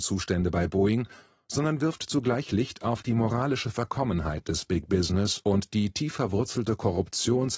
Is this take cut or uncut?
uncut